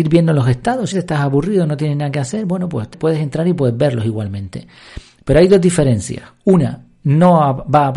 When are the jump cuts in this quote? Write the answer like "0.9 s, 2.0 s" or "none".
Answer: 0.9 s, 2.9 s